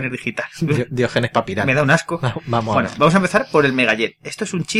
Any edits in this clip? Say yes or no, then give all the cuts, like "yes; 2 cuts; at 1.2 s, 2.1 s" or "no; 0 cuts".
no; 0 cuts